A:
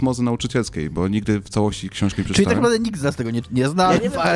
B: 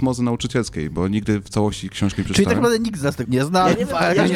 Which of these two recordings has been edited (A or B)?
B